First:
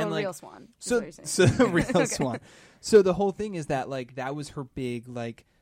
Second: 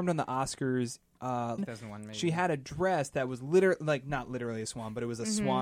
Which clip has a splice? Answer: second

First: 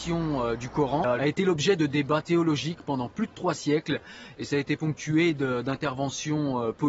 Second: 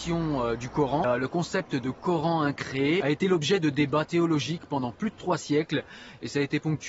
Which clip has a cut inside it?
first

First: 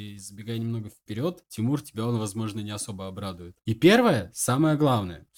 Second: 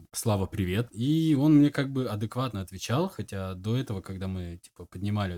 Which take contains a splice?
first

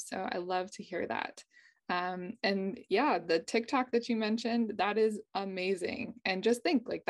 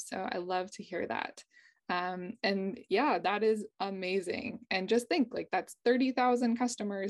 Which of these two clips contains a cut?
second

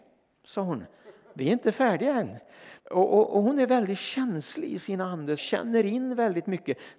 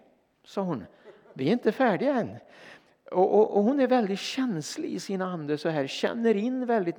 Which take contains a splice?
first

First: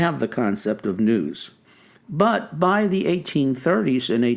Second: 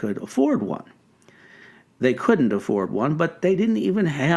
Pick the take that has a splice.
first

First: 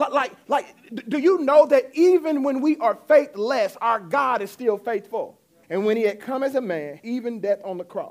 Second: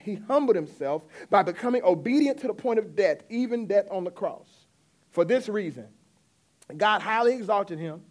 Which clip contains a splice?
first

